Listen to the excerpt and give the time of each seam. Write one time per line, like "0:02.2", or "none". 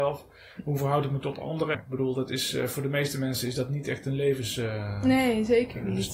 0:01.7